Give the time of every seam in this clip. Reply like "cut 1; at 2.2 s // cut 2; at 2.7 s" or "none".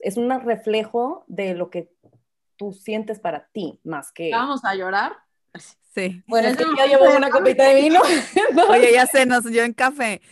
none